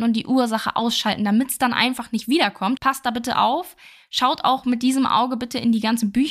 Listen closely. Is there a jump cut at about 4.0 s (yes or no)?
no